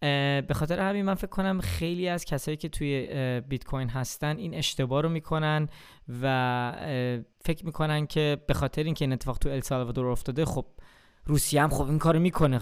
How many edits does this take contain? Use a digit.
1